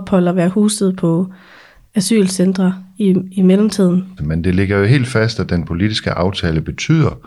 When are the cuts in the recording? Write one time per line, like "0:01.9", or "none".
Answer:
0:04.2

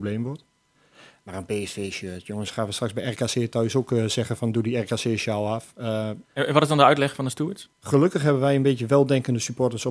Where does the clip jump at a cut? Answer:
0:06.2
0:07.7

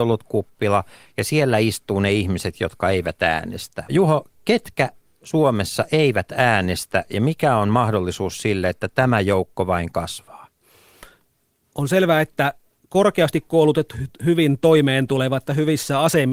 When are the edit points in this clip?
0:03.9

